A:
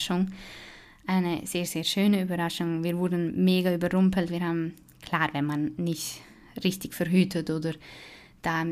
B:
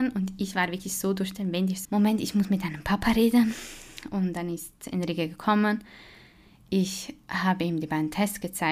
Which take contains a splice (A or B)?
B